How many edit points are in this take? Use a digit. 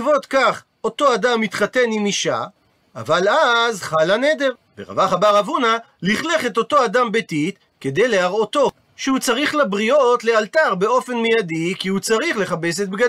1